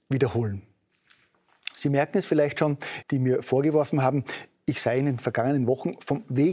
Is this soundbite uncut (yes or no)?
no